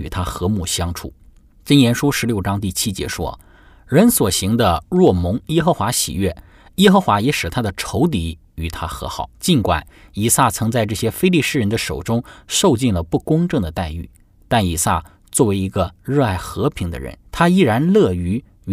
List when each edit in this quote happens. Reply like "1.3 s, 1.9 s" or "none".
9.3 s, 17.3 s